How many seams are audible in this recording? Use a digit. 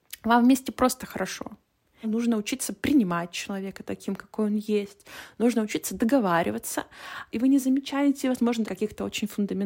3